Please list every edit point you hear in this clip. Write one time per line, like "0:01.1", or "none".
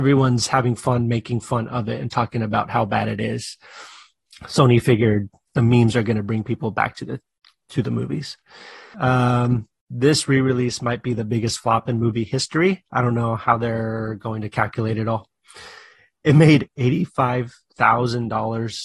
0:04.3
0:08.9